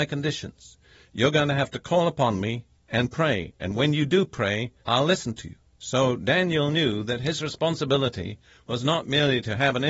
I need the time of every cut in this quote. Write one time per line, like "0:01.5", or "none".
0:04.8